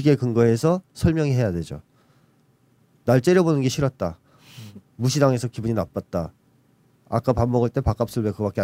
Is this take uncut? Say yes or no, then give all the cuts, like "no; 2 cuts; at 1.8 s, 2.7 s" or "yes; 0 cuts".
yes; 0 cuts